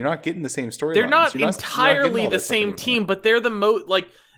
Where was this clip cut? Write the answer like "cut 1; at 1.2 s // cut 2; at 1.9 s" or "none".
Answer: none